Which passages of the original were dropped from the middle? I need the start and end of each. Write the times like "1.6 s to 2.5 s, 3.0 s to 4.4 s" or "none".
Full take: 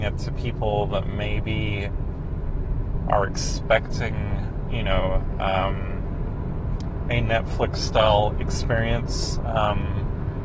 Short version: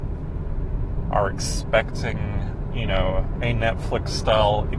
5.3 s to 7.0 s